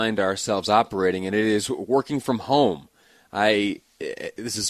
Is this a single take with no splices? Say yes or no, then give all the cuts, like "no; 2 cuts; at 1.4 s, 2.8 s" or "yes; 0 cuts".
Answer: yes; 0 cuts